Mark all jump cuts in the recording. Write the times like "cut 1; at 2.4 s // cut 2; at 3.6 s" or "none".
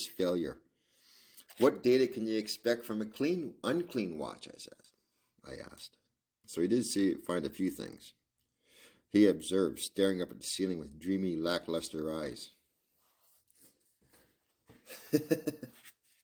cut 1; at 6.4 s